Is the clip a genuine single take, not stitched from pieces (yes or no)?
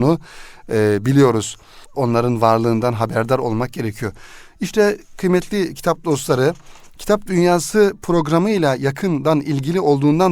no